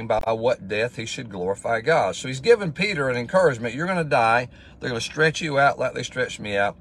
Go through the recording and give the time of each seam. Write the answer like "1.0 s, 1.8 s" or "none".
none

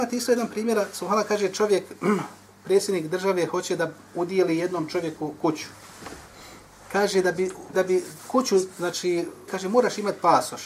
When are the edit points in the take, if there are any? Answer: 7.7 s, 9.5 s

